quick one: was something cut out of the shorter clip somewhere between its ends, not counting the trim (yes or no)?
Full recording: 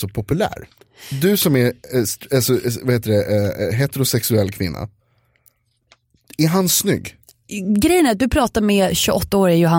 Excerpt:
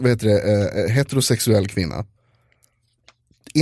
no